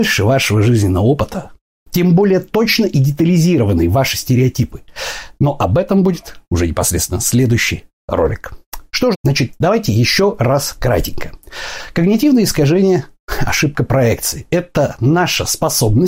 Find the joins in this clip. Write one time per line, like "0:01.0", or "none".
0:09.1